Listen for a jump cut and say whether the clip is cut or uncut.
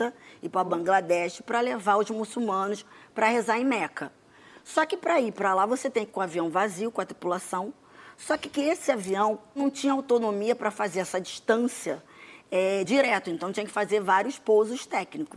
uncut